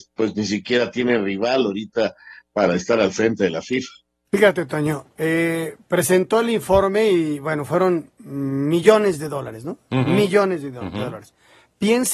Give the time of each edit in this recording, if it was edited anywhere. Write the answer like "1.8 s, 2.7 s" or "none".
none